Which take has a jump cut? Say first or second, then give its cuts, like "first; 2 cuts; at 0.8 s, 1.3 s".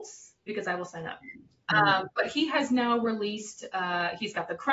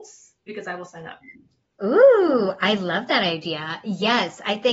first; 1 cut; at 1.7 s